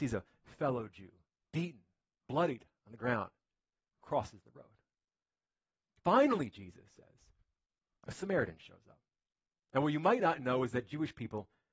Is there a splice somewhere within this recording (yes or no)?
no